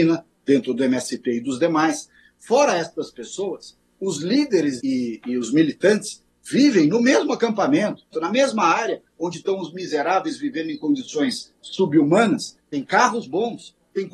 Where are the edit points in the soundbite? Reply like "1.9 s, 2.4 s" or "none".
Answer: 4.8 s, 8.1 s, 12.6 s